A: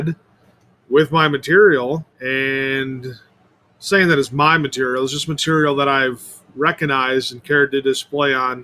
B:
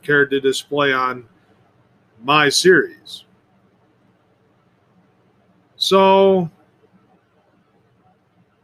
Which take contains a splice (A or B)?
A